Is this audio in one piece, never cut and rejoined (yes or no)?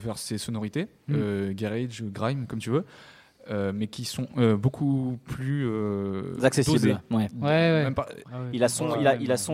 no